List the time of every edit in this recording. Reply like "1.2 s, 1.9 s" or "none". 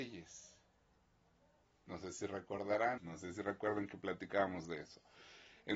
1.6 s, 3.0 s